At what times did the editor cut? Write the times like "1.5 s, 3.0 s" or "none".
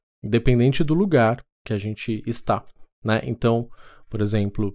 1.5 s